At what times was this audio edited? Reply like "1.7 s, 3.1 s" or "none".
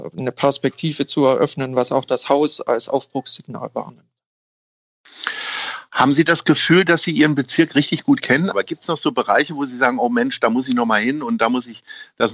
8.5 s